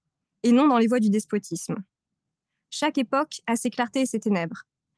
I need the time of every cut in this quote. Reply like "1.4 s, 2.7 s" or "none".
2.6 s